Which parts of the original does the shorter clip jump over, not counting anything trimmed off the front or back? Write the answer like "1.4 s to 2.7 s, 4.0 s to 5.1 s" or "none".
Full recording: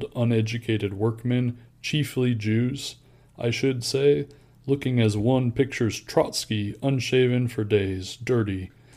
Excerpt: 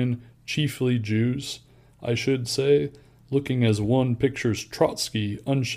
none